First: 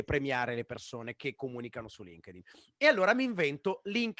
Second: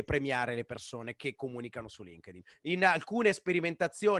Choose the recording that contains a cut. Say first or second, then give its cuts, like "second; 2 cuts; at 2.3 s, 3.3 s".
second; 1 cut; at 2.5 s